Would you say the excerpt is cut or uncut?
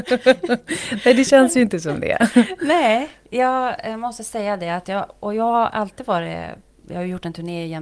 cut